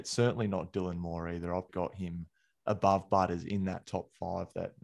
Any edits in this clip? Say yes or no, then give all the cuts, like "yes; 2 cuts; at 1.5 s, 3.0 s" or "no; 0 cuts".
yes; 1 cut; at 1.7 s